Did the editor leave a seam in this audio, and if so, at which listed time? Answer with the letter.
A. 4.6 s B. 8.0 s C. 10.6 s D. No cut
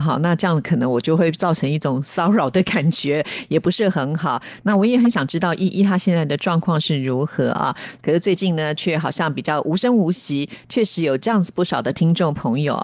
B